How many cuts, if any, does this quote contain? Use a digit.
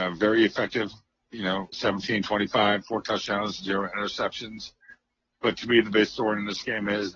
1